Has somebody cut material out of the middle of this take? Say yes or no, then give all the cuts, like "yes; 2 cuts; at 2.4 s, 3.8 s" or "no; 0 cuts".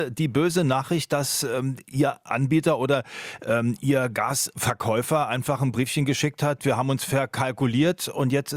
yes; 1 cut; at 6.6 s